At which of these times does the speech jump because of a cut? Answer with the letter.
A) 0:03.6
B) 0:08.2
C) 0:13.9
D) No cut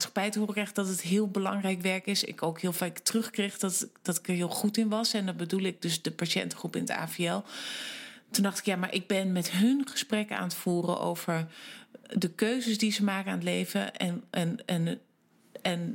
D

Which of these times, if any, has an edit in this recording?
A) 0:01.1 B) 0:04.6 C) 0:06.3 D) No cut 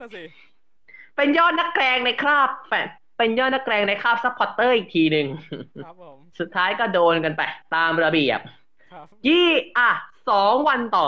C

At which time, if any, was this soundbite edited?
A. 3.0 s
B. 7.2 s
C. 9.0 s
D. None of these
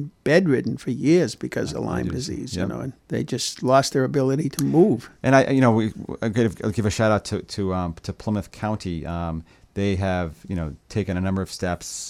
A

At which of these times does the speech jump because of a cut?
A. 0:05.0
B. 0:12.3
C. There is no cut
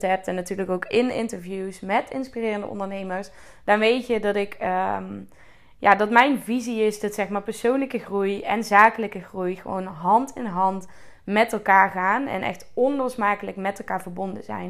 C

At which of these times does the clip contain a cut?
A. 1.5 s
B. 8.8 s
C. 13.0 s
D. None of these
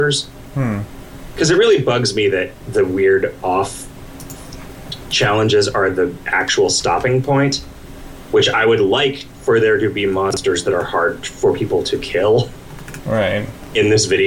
D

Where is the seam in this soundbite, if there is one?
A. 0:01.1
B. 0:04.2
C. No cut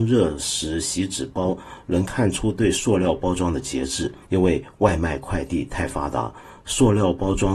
B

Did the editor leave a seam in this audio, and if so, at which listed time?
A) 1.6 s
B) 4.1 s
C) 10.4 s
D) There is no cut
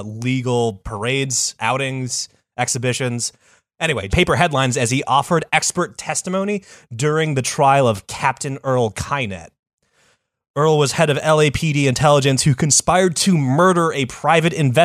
B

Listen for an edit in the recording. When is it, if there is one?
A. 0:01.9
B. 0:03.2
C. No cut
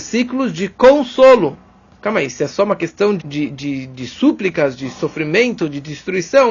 B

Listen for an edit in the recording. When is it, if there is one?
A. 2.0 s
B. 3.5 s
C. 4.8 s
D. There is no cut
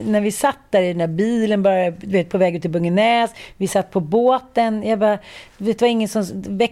D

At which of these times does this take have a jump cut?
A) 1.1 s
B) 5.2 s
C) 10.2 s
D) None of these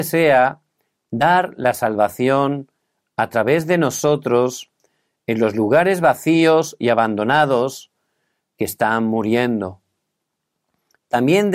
D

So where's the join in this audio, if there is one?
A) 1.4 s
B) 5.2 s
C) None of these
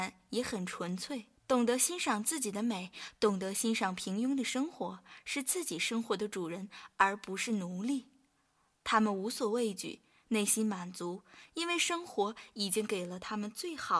A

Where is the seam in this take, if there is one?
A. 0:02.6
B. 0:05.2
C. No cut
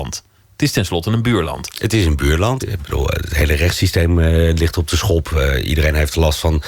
A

